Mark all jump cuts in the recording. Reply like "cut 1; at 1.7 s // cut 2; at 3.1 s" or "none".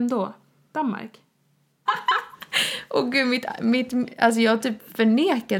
cut 1; at 1.9 s